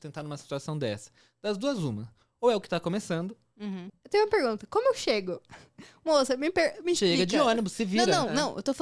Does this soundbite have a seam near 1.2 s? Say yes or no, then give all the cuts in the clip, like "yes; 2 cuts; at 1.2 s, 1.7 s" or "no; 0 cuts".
no; 1 cut; at 3.9 s